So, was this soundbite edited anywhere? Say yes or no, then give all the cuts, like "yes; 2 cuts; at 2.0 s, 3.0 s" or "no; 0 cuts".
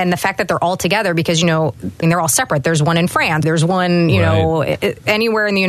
yes; 2 cuts; at 2.0 s, 3.4 s